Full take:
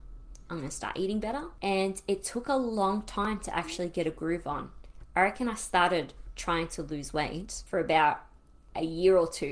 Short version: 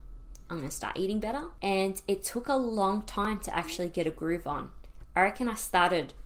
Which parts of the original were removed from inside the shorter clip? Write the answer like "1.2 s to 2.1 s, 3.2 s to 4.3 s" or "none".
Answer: none